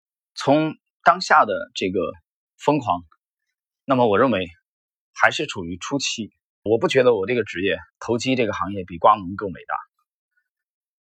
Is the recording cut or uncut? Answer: cut